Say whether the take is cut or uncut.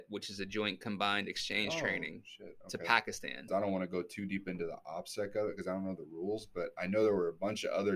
cut